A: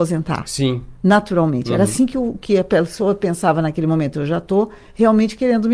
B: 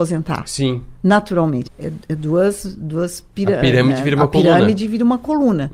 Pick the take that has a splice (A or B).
B